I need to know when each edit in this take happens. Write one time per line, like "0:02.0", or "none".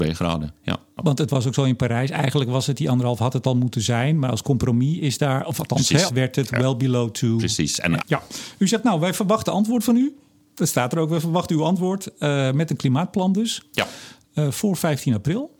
0:01.0
0:06.1
0:08.0